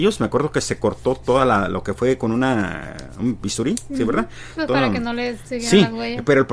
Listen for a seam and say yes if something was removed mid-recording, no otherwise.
yes